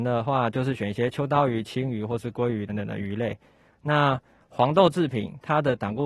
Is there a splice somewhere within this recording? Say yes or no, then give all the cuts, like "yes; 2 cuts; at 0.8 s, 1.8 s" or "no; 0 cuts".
yes; 1 cut; at 2.7 s